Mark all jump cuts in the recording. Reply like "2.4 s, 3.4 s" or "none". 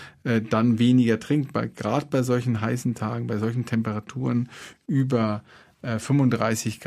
none

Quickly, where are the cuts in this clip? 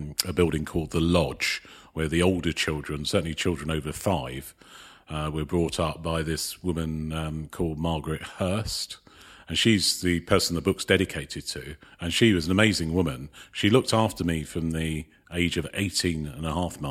none

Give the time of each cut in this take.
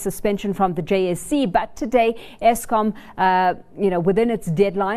none

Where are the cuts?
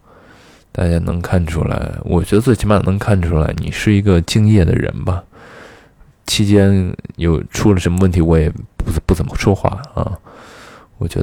9.3 s

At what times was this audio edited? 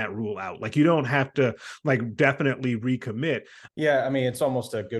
3.7 s

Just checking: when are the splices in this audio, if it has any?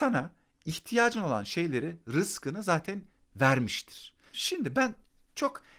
4.3 s

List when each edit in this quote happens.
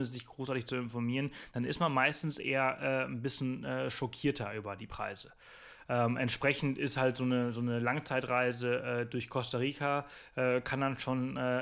none

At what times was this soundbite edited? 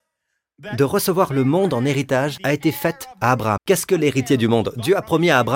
3.6 s

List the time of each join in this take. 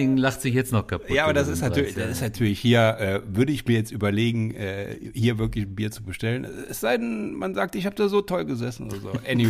none

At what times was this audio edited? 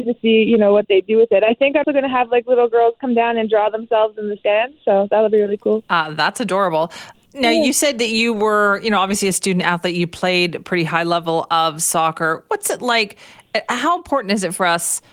1.8 s

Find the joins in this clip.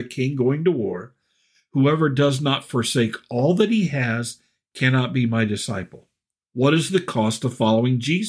6.4 s

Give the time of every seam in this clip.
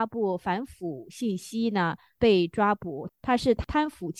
3.1 s

